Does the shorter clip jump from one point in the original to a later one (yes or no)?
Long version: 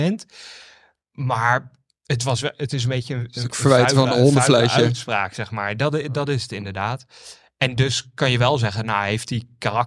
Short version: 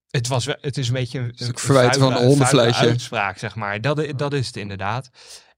no